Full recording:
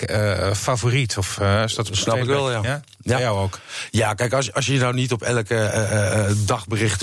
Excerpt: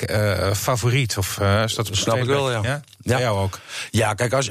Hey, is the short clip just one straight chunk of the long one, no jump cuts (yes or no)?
yes